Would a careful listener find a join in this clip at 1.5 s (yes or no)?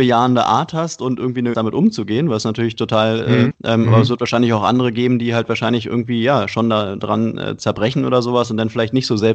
yes